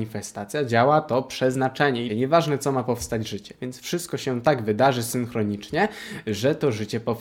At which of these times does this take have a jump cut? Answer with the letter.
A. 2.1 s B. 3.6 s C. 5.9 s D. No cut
A